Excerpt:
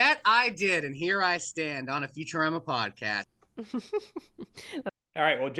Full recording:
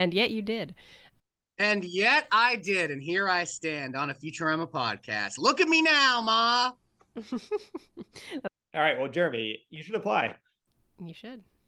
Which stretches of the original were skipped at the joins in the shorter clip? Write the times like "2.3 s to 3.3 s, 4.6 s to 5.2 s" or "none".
5.3 s to 6.8 s